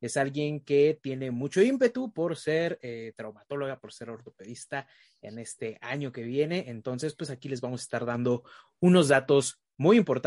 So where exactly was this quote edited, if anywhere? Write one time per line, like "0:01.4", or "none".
none